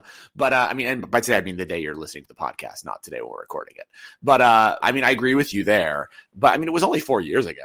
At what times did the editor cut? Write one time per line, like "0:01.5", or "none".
0:04.8